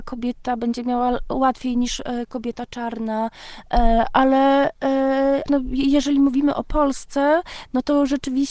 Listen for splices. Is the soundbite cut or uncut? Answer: cut